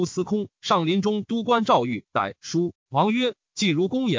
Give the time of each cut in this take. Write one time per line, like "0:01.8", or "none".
0:02.8